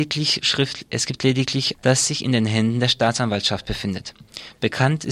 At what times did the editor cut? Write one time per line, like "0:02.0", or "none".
0:01.7